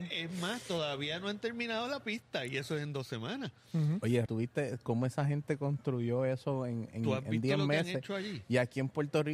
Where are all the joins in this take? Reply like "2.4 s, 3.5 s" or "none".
4.3 s